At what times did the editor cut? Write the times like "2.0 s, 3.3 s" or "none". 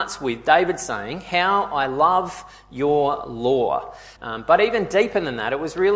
4.2 s